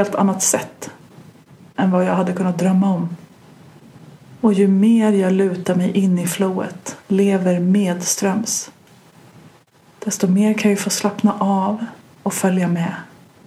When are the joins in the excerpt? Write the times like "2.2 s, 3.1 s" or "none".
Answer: 7.0 s